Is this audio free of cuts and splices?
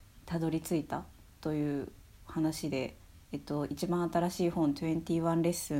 yes; 0 cuts

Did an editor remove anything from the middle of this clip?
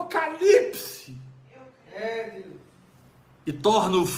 no; 0 cuts

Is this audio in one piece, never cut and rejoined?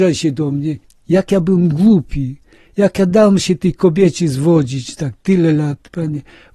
yes; 0 cuts

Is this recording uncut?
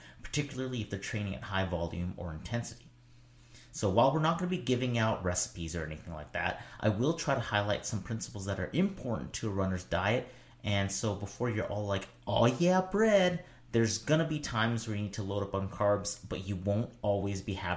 yes; 0 cuts

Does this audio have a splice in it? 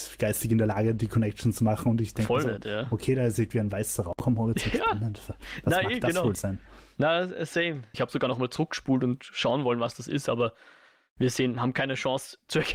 yes; 1 cut; at 7.9 s

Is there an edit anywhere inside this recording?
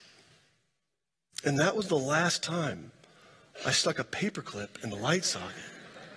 no; 0 cuts

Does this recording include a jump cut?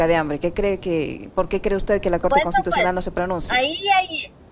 no; 0 cuts

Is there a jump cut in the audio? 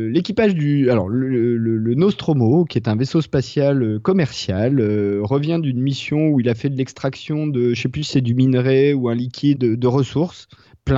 yes; 1 cut; at 9.5 s

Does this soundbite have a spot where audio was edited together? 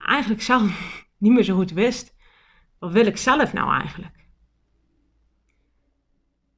no; 0 cuts

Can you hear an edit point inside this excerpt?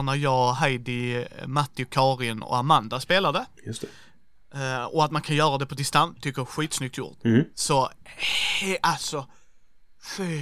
no; 0 cuts

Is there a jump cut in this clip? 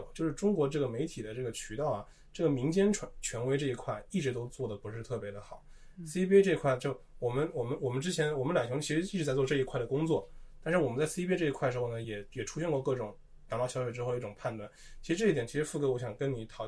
no; 0 cuts

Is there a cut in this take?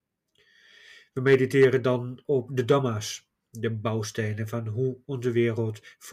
no; 0 cuts

